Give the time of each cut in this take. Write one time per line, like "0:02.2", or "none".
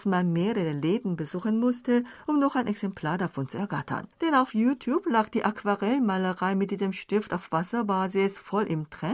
0:04.1